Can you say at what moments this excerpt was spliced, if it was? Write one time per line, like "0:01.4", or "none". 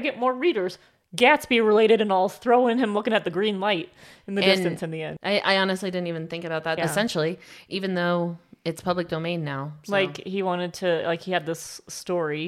0:05.2
0:06.8